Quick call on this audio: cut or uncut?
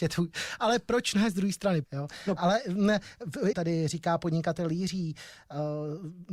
cut